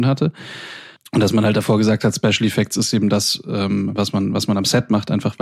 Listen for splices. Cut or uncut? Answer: uncut